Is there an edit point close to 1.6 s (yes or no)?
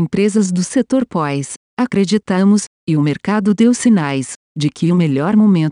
no